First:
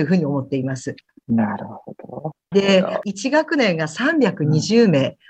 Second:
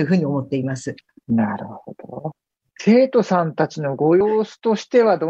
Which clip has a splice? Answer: first; 1 cut; at 2.5 s

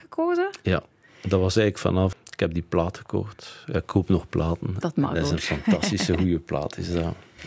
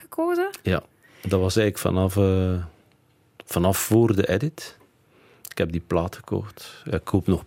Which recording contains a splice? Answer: first; 2 cuts; at 2.1 s, 4.8 s

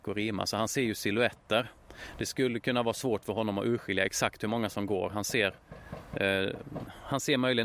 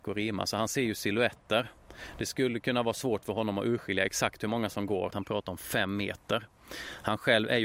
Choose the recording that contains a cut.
second; 1 cut; at 5.1 s

